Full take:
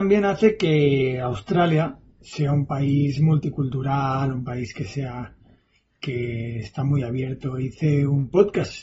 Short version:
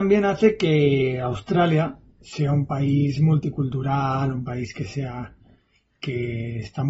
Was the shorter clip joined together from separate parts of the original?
no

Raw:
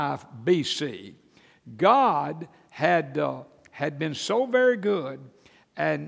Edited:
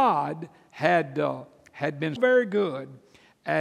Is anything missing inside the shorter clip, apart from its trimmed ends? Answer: yes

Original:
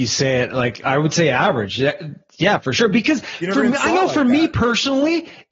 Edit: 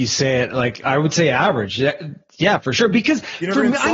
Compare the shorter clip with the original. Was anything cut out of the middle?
no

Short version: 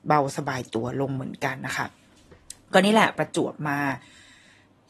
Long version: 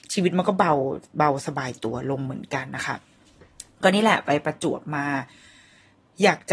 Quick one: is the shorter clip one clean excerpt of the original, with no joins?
no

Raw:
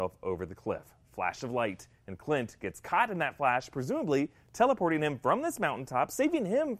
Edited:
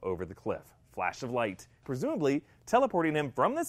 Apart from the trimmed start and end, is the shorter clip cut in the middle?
yes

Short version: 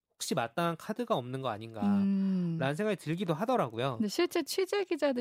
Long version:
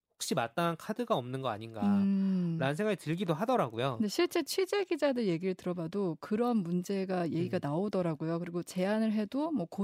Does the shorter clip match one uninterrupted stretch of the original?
yes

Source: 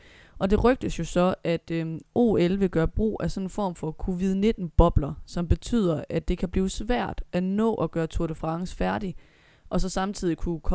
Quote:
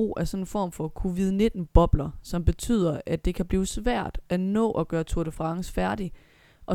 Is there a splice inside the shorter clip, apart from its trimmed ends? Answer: no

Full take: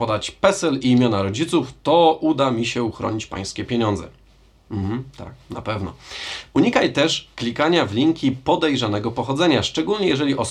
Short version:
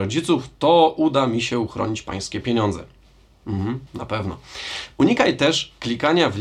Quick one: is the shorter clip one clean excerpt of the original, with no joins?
no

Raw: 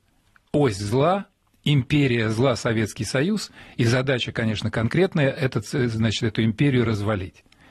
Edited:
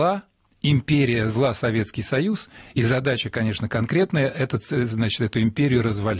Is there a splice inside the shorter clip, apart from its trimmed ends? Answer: no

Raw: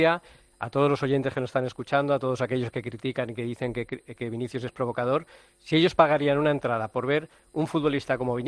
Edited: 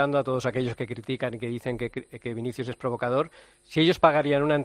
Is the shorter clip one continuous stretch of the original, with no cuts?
yes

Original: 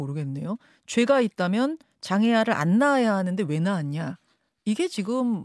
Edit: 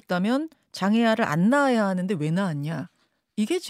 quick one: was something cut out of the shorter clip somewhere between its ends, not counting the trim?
no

